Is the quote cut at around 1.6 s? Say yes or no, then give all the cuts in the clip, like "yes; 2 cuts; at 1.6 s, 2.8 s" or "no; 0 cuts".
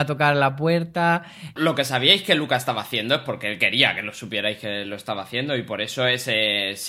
yes; 1 cut; at 1.6 s